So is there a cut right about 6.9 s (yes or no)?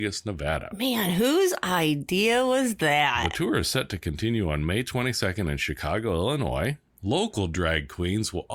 yes